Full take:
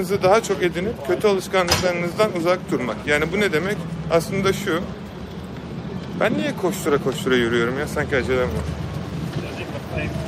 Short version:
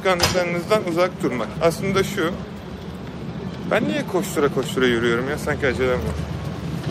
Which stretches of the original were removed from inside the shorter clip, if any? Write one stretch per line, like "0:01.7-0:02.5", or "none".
0:03.0-0:04.0